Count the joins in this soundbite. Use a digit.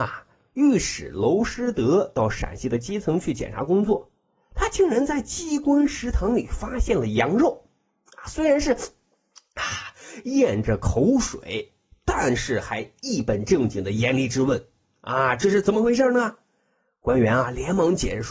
0